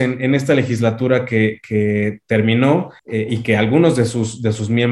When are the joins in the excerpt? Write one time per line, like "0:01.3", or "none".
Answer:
0:03.0